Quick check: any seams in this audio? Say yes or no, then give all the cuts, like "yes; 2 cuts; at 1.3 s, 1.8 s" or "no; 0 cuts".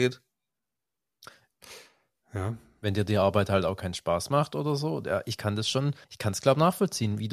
yes; 1 cut; at 6.0 s